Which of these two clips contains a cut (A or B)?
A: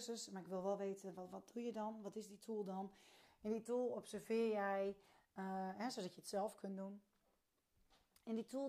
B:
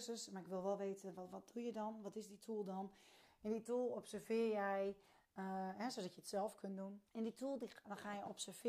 B